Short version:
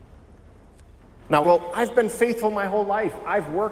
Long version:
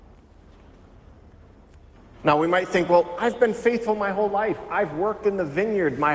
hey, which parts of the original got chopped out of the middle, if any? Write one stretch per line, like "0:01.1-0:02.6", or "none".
0:02.4-0:02.9